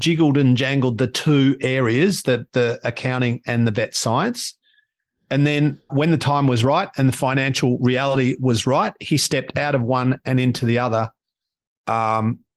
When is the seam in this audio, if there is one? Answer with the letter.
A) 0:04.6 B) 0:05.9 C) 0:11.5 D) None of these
B